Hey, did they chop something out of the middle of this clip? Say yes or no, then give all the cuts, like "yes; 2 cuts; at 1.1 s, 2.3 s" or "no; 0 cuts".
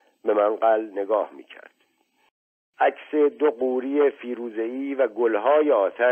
no; 0 cuts